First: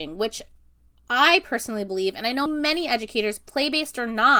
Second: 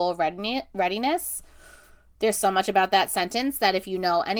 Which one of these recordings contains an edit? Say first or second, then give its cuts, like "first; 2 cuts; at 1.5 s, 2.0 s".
first; 1 cut; at 2.5 s